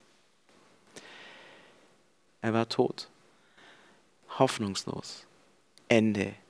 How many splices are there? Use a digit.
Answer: 1